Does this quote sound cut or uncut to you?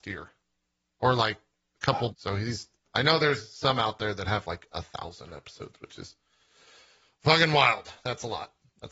cut